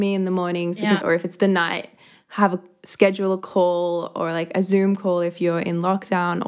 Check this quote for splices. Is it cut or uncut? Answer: cut